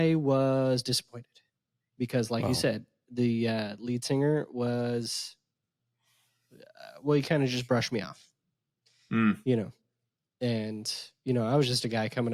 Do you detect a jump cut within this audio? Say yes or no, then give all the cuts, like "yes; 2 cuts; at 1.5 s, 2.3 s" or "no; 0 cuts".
no; 0 cuts